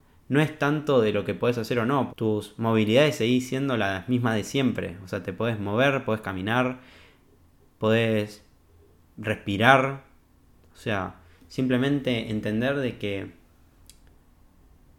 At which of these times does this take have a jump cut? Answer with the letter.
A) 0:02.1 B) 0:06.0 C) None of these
A